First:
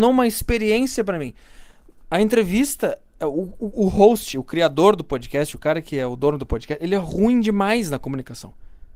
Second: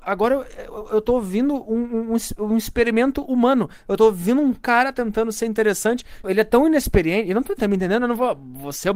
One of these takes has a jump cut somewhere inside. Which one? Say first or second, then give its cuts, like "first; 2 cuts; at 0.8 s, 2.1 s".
second; 2 cuts; at 6.2 s, 7.6 s